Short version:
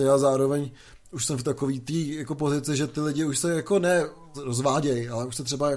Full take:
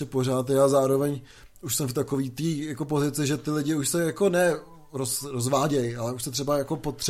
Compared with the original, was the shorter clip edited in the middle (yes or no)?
yes